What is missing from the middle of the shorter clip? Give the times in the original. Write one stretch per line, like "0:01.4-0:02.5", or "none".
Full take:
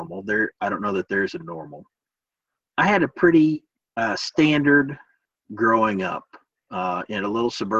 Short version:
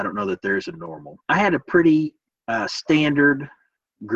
0:01.9-0:02.7